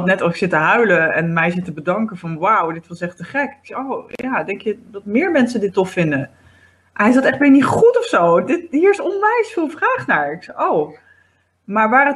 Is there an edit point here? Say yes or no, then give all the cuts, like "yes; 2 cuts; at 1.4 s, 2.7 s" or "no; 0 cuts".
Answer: no; 0 cuts